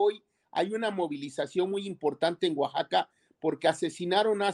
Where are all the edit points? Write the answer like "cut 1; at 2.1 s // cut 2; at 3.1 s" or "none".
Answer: none